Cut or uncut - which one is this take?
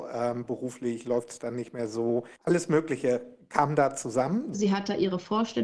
cut